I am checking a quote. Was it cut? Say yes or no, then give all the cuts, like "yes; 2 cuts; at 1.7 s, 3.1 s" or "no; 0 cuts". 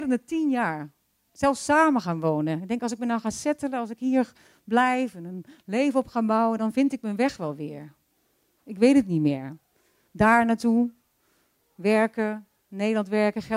yes; 1 cut; at 8.6 s